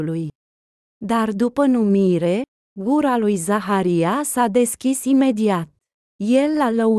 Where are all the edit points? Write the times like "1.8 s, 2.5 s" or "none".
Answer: 1.0 s